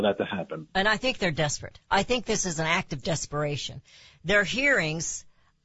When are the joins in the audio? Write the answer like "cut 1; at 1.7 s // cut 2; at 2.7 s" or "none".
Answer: none